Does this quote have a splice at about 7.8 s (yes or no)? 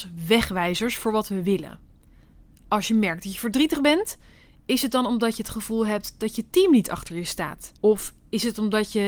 yes